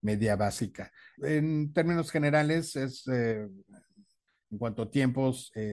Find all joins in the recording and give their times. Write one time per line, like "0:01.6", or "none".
0:01.2